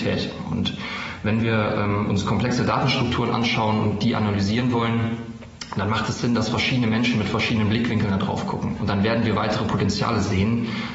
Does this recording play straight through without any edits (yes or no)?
no